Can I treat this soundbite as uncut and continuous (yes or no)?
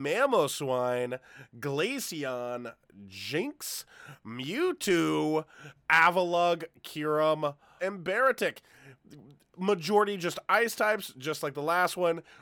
no